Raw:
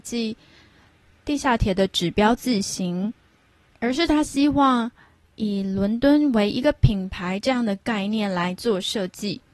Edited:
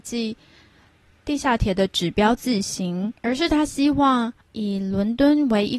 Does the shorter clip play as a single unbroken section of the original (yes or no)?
no